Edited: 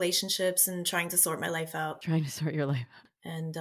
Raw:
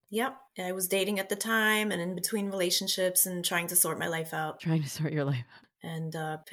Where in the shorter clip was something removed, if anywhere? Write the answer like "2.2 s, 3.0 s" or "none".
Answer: none

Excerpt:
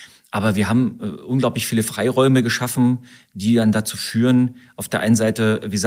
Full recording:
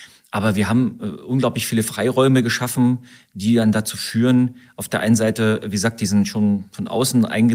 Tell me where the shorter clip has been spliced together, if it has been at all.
none

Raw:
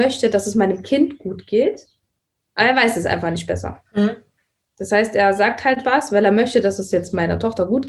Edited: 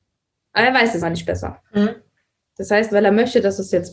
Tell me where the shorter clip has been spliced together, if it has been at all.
1.0 s, 2.9 s

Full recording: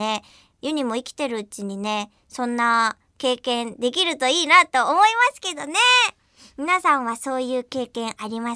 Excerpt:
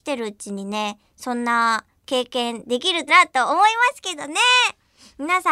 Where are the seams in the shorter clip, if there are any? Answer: 3.1 s

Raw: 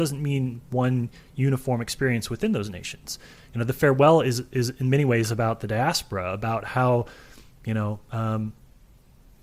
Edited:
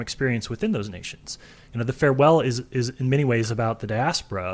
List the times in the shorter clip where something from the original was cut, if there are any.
none

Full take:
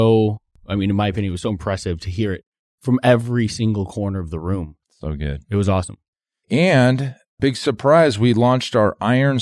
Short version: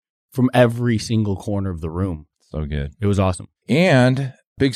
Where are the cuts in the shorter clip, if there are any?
3.6 s

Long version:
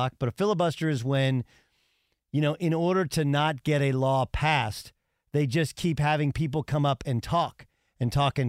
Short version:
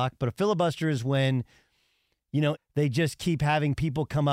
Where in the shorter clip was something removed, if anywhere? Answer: 2.6 s

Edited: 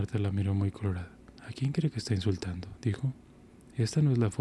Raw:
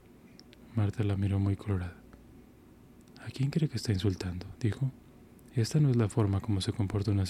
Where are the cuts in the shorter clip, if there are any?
1.3 s

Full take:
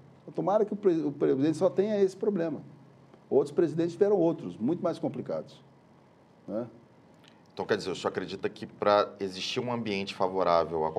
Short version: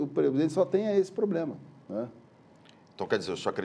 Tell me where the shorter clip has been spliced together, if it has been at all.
1.8 s

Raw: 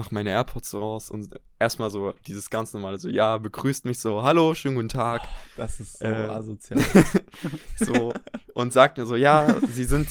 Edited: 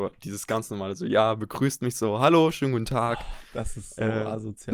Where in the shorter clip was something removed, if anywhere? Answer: none

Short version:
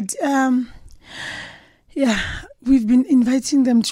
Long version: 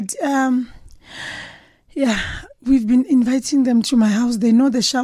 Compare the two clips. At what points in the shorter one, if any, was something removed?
none

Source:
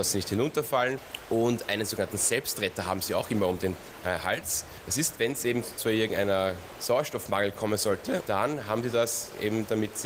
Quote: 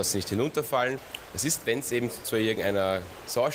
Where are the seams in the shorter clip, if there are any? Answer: 1.3 s

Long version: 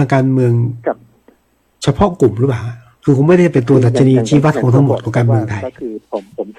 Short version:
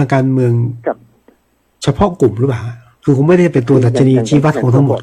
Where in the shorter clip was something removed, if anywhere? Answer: none

